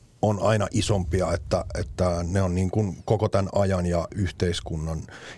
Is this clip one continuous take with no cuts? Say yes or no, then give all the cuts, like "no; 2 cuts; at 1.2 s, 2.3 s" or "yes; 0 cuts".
yes; 0 cuts